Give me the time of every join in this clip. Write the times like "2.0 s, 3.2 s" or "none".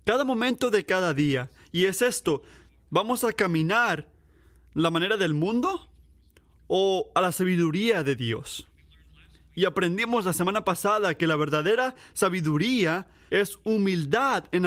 13.3 s